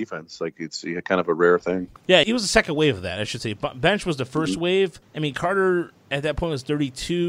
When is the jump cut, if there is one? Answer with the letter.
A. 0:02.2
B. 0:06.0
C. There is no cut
A